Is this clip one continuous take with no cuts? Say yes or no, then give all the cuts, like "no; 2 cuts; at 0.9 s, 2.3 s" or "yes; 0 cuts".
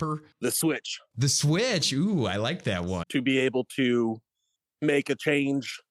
no; 1 cut; at 3.0 s